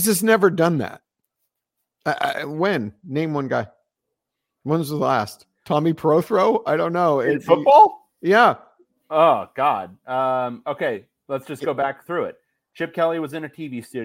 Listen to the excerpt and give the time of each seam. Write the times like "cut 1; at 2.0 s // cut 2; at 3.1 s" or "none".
none